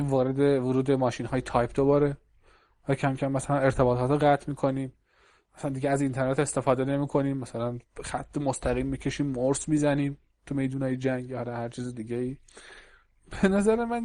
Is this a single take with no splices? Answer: yes; 0 cuts

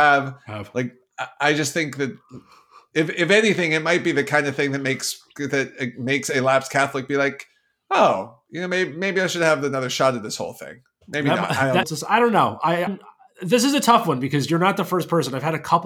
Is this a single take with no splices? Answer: no; 2 cuts; at 11.8 s, 12.9 s

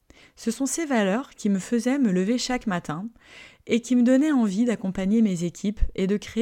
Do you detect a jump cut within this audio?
no; 0 cuts

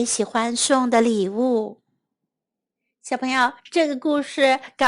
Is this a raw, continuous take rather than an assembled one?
yes; 0 cuts

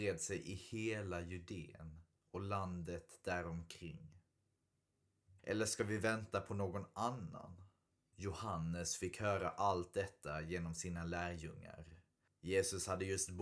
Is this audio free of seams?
no; 3 cuts; at 5.4 s, 8.1 s, 12.3 s

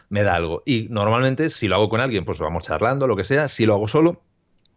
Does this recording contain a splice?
yes; 1 cut; at 2.3 s

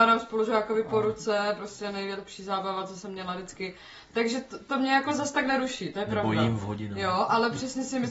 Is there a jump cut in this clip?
no; 0 cuts

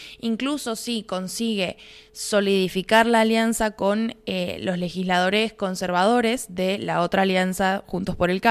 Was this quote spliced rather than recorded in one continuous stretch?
no; 0 cuts

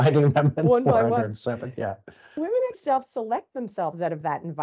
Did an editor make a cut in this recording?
yes; 1 cut; at 2.7 s

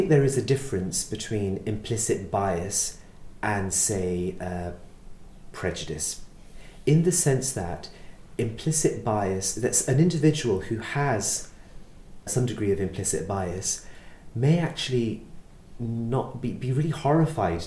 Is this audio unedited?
no; 1 cut; at 12.3 s

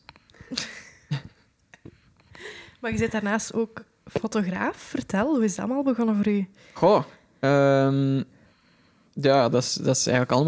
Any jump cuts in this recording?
no; 0 cuts

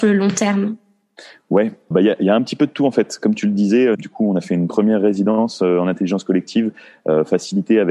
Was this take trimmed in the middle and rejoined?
yes; 2 cuts; at 1.9 s, 3.9 s

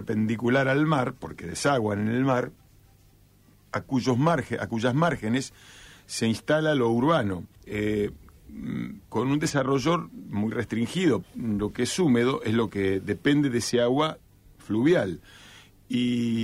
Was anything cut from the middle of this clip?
yes; 2 cuts; at 7.5 s, 11.2 s

